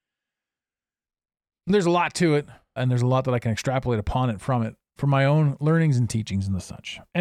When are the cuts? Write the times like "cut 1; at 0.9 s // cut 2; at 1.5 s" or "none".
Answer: cut 1; at 2.8 s // cut 2; at 5.0 s